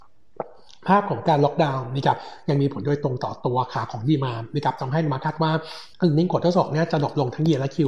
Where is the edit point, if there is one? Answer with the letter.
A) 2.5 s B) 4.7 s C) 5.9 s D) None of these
C